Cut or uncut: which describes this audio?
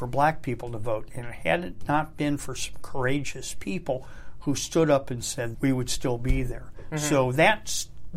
cut